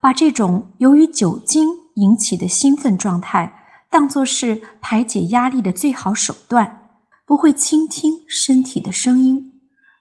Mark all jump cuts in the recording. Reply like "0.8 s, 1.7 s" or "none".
7.1 s